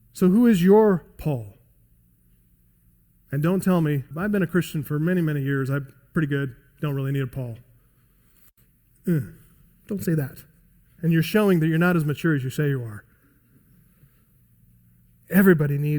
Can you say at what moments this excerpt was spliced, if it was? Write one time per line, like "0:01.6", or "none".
0:04.1
0:11.0